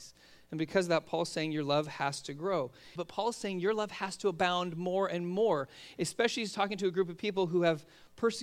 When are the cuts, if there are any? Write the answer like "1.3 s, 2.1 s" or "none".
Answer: 3.0 s